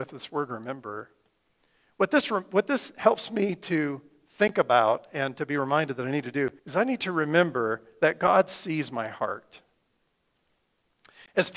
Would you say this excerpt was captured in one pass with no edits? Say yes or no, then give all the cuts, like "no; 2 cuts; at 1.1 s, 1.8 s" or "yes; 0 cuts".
no; 1 cut; at 6.6 s